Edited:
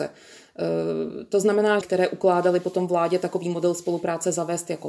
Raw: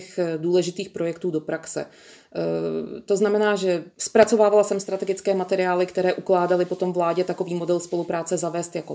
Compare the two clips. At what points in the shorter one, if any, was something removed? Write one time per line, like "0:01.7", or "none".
0:01.8